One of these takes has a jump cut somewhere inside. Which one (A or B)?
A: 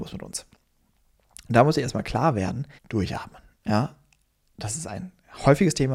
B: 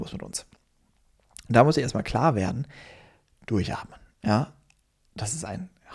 A